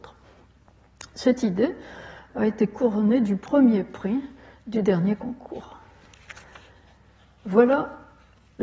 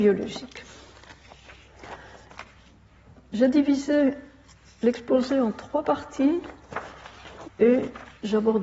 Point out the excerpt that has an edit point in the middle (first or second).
second